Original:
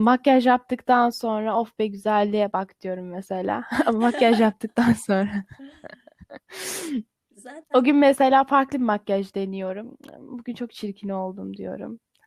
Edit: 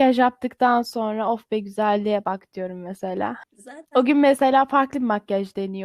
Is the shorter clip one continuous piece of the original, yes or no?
no